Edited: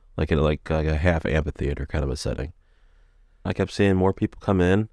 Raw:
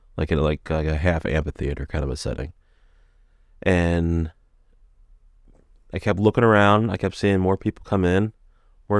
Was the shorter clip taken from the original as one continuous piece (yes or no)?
no